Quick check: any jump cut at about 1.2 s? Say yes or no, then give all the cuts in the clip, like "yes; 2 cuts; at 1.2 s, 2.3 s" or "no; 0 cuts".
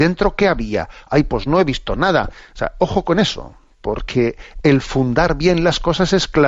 no; 0 cuts